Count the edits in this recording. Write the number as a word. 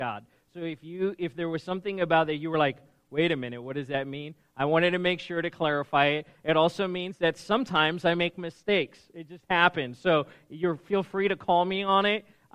zero